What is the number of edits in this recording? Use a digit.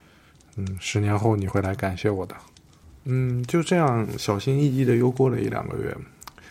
0